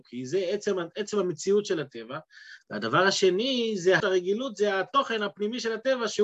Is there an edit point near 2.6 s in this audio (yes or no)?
no